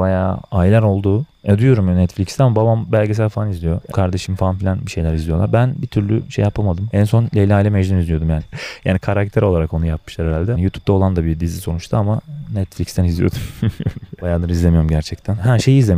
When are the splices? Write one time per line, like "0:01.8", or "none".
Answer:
0:03.9
0:08.4
0:10.5